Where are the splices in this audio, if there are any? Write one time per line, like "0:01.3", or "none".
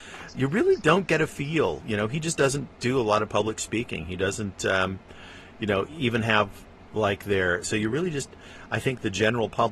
0:05.9
0:07.6